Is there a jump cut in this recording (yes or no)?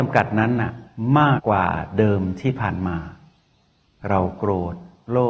yes